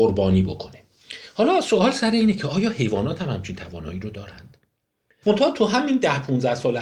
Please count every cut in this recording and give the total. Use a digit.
1